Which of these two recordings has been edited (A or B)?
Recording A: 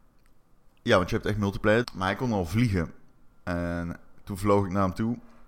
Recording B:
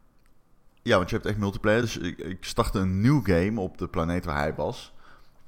A